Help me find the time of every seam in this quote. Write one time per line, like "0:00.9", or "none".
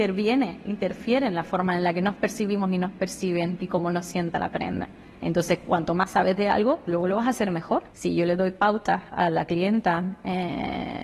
0:07.9